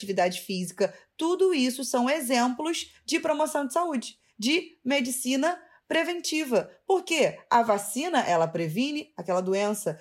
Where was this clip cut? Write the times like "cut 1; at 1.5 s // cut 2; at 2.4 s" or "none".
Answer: none